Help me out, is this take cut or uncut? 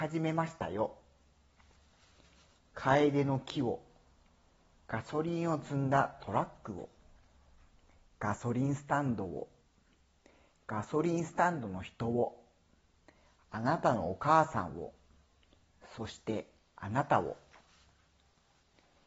uncut